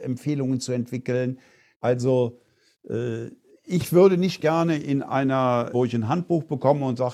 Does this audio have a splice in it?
yes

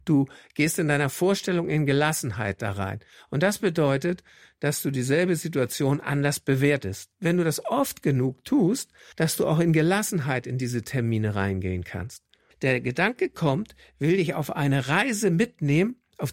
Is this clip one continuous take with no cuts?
no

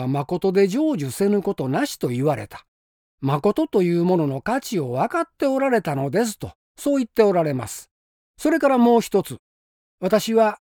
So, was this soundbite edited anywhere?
yes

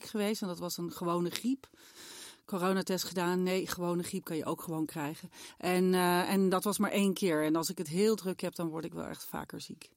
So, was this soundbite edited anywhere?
no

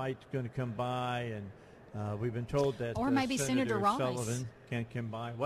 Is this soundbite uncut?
yes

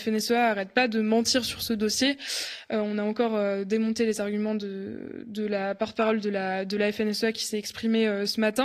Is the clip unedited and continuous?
yes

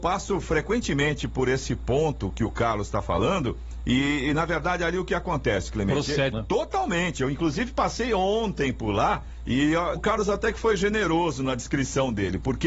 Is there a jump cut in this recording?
yes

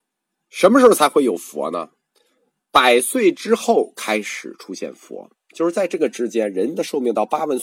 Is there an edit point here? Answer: no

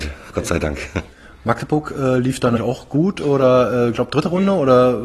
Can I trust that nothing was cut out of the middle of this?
no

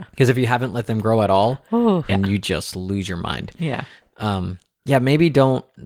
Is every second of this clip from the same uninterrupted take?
no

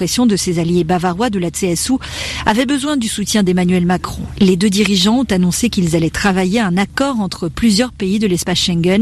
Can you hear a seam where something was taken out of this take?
no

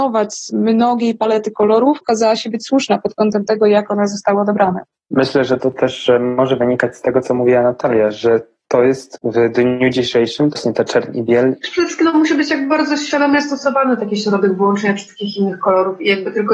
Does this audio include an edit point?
yes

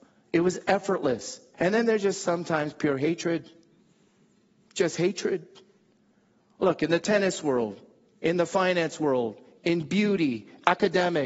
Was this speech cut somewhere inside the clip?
yes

